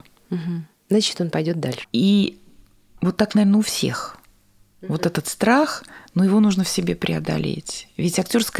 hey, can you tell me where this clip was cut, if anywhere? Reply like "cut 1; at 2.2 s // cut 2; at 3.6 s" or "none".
cut 1; at 1.8 s